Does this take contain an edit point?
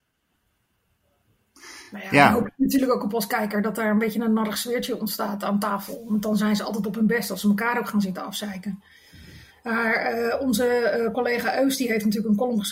no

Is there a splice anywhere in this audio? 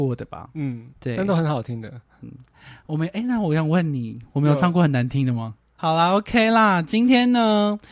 yes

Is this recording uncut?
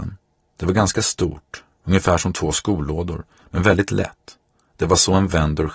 yes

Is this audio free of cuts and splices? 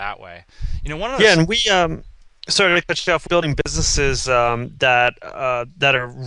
no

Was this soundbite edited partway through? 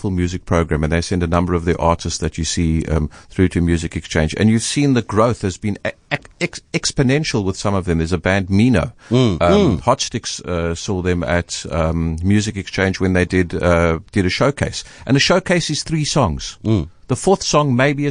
no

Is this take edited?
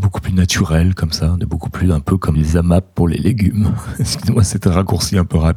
yes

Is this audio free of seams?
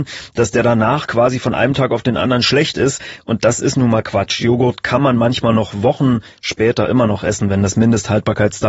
yes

